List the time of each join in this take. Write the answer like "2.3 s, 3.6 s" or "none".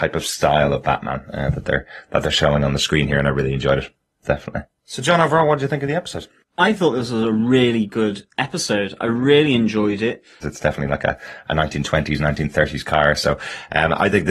10.4 s